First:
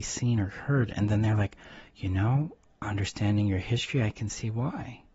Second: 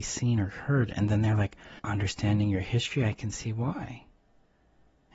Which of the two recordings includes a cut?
second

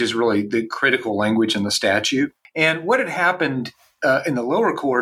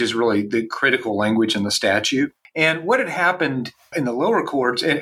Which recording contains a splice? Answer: second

